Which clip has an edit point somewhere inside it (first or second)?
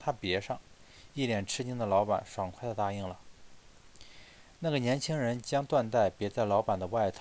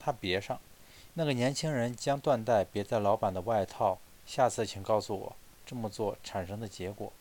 second